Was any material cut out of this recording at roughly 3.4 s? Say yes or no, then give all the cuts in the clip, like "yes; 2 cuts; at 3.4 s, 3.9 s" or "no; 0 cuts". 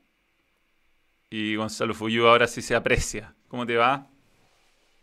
no; 0 cuts